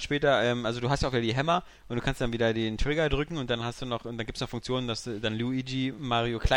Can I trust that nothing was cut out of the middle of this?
yes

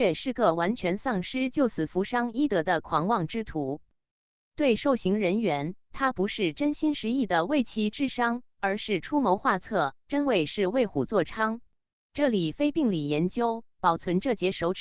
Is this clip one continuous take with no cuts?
no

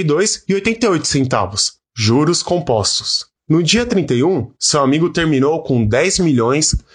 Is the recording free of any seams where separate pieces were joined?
no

